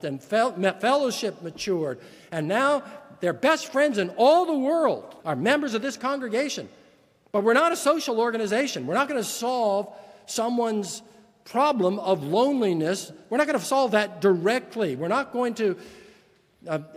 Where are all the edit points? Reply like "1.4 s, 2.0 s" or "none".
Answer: 5.2 s

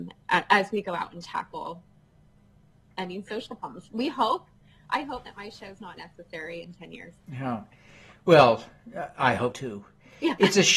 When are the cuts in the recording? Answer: 5.3 s, 7.2 s, 9.5 s

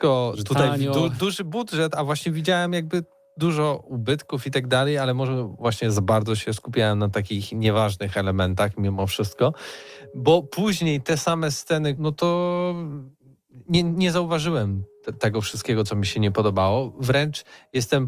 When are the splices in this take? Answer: 12.0 s

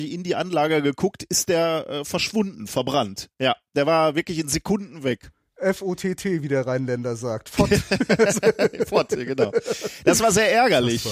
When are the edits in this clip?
none

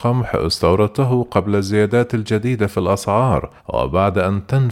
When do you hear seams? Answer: 3.6 s

